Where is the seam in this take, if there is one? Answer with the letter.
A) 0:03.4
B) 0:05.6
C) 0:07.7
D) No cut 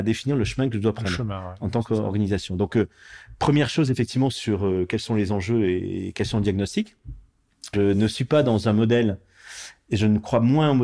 C